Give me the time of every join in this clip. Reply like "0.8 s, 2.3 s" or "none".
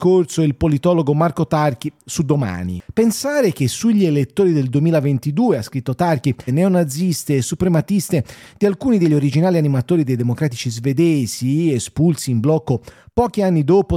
6.5 s